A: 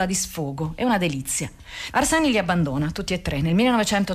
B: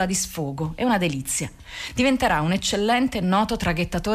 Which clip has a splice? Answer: A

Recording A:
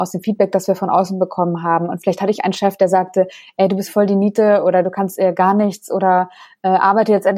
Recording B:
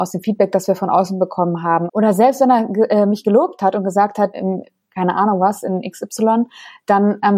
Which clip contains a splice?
B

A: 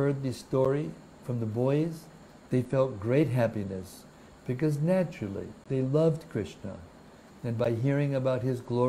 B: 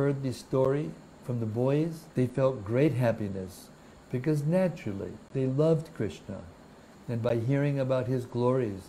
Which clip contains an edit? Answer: B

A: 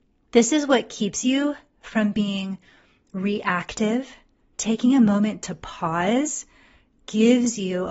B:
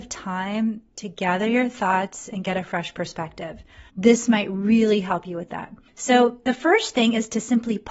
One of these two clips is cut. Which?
B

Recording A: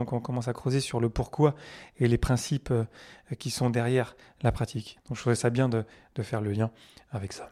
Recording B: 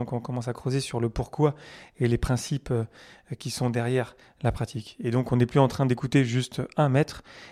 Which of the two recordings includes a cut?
A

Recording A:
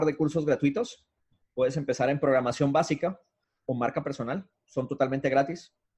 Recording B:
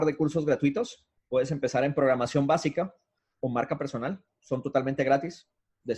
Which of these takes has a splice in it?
B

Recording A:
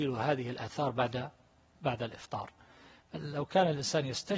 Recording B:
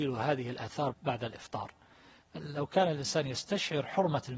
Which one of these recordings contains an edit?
B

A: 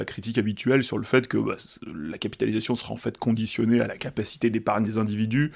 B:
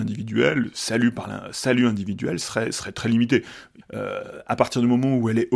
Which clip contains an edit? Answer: B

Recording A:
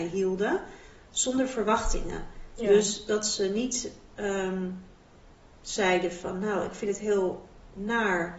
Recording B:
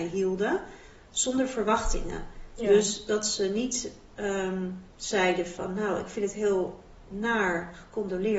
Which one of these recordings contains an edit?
B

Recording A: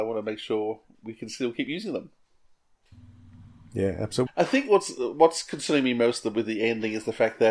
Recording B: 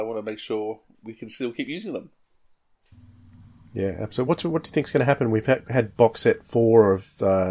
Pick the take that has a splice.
A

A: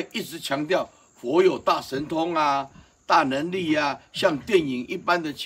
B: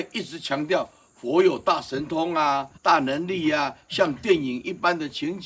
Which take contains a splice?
B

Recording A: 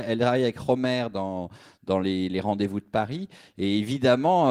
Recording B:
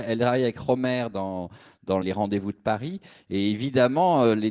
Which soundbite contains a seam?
B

